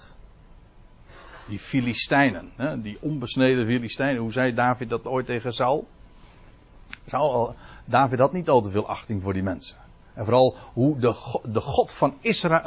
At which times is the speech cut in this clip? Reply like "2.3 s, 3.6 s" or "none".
none